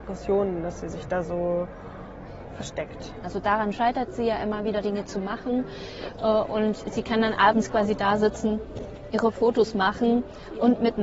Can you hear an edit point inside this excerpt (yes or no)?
yes